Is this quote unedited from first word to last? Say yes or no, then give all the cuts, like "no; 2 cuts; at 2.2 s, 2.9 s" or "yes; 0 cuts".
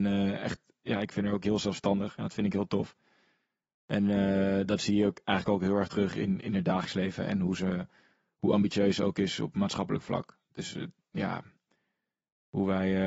yes; 0 cuts